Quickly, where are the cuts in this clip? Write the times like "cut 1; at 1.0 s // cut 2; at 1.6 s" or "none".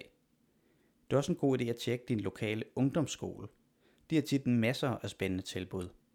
none